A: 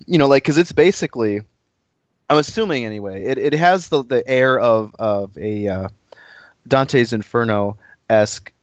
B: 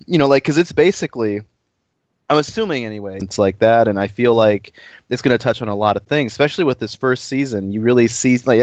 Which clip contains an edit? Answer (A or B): B